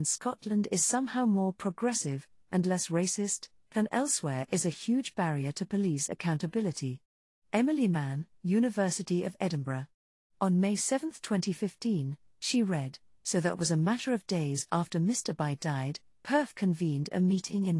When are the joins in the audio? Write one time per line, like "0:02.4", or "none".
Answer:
none